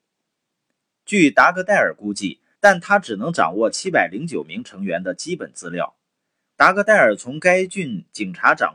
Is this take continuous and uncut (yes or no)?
no